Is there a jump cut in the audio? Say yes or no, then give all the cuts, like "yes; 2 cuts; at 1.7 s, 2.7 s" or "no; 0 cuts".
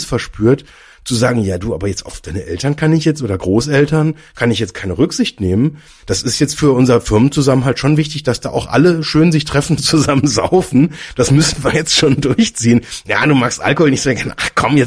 no; 0 cuts